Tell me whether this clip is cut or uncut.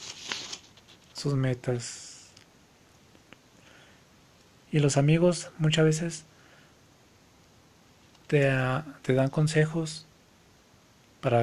uncut